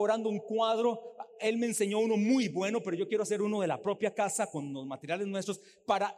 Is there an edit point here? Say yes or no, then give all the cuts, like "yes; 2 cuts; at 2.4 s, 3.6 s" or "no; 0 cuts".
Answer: no; 0 cuts